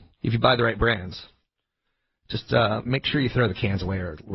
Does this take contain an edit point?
no; 0 cuts

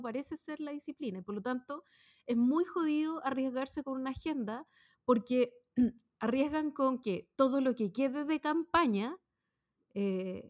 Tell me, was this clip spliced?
no; 0 cuts

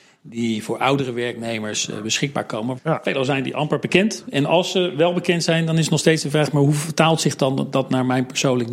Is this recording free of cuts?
no; 1 cut; at 2.8 s

